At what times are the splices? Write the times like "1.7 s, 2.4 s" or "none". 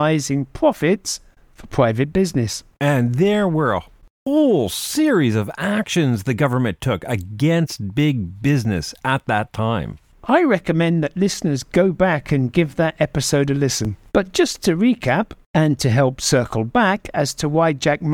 2.7 s, 14.1 s

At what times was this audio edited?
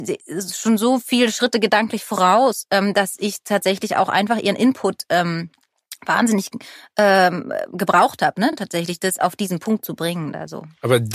none

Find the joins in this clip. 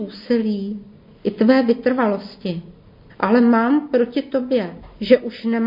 3.1 s

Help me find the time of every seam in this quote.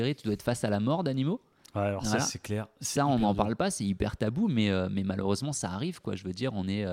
none

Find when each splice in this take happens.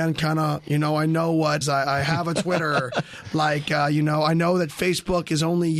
1.6 s

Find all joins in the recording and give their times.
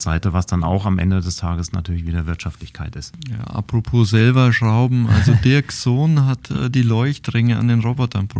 none

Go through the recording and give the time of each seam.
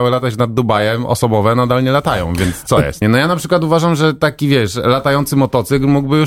3.0 s

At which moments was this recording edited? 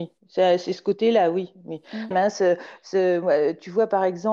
2.1 s

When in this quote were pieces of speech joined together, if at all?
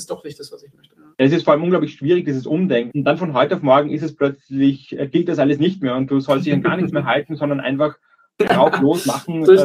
1.1 s, 2.9 s

